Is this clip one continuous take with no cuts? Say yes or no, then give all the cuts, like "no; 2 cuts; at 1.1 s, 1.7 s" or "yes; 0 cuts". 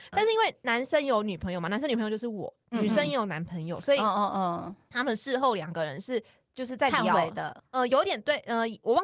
yes; 0 cuts